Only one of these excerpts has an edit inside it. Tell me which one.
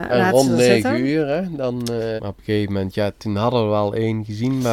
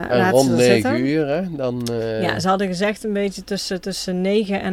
first; 1 cut; at 2.2 s

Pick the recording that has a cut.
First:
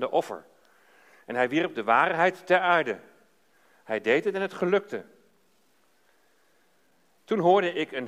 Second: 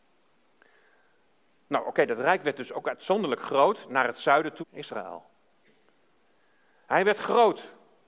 second; 1 cut; at 4.6 s

